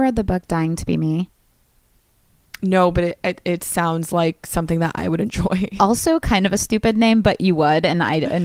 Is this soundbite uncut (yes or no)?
yes